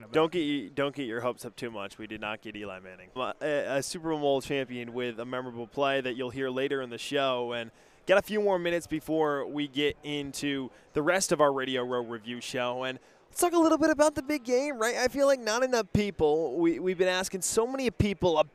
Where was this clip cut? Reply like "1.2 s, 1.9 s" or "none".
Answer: 3.2 s